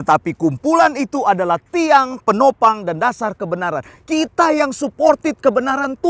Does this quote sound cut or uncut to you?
uncut